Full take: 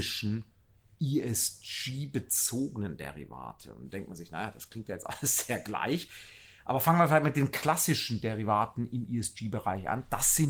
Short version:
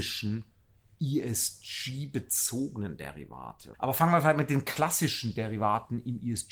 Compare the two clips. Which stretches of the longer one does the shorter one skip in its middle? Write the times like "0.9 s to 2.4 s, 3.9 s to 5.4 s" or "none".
3.7 s to 6.6 s